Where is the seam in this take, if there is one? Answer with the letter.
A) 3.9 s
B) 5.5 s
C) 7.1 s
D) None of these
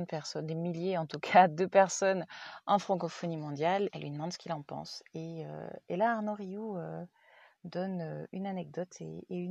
A